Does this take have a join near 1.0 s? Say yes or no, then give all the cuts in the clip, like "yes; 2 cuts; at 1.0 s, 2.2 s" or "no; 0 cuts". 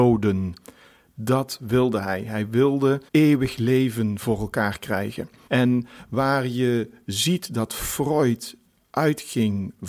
no; 2 cuts; at 3.1 s, 5.5 s